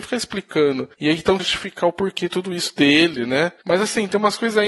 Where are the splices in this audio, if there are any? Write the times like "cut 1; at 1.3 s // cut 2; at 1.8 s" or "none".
cut 1; at 1.4 s

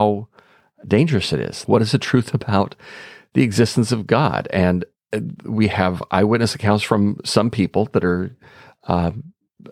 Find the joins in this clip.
cut 1; at 1.7 s

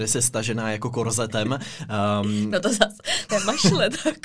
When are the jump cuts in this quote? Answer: cut 1; at 3.3 s

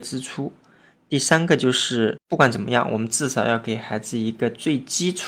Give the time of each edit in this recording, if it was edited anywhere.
none

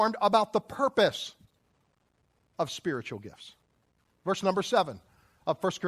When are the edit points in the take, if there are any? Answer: none

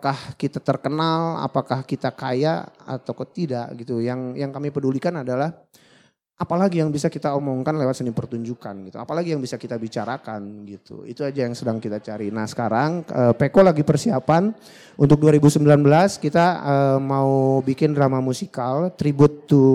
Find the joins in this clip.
none

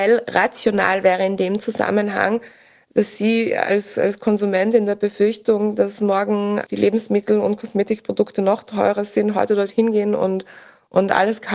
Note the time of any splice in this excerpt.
none

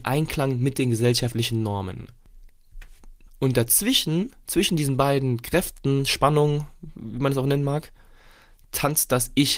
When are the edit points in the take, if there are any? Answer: cut 1; at 3.3 s

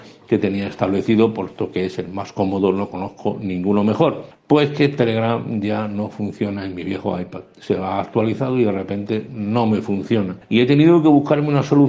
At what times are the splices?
cut 1; at 4.3 s

